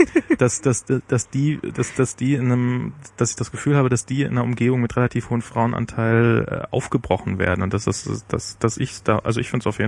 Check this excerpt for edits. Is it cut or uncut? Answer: uncut